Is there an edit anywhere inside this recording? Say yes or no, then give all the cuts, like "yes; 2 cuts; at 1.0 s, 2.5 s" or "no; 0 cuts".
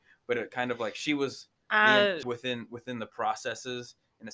yes; 1 cut; at 2.2 s